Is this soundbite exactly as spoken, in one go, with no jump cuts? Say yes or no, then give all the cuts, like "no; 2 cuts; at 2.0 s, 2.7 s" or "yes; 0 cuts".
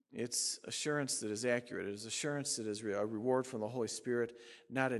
yes; 0 cuts